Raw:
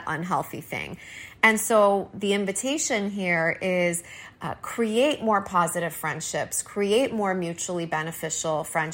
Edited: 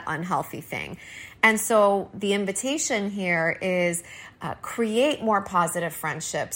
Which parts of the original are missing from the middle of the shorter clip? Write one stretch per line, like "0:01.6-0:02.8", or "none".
none